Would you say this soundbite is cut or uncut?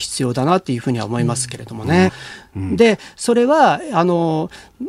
cut